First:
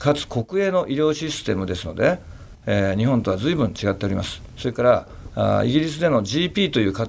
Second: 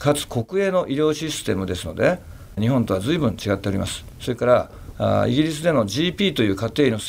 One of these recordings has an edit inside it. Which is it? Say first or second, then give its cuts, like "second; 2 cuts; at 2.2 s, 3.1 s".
second; 1 cut; at 2.6 s